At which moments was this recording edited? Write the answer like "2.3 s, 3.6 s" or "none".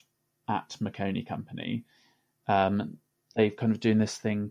none